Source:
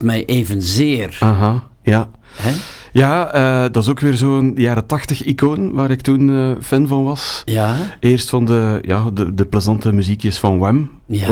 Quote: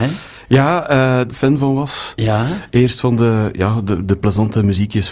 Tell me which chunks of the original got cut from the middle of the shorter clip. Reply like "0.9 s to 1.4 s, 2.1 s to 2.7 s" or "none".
3.7 s to 6.6 s

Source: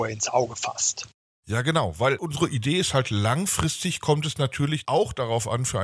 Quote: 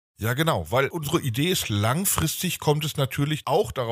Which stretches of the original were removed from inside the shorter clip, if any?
2.9 s to 3.0 s

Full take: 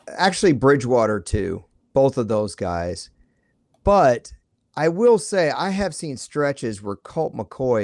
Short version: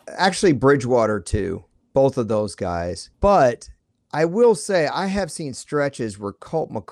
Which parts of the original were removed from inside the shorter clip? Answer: 3.1 s to 3.8 s

